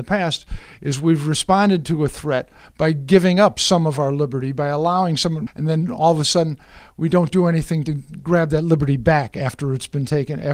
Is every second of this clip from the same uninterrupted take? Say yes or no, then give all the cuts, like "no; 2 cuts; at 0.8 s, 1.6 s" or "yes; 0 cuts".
no; 1 cut; at 5.5 s